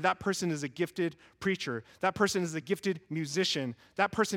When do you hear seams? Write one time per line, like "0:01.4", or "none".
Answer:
none